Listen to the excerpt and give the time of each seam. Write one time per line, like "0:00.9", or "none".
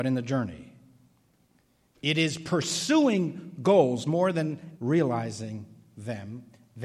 0:04.8